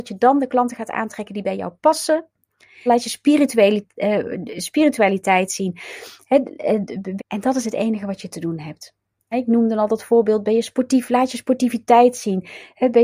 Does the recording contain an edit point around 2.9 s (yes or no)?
yes